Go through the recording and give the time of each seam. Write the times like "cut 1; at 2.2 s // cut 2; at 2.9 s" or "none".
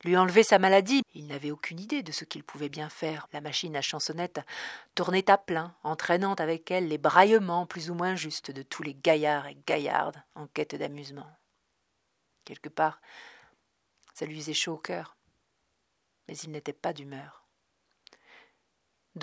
cut 1; at 1.0 s // cut 2; at 3.3 s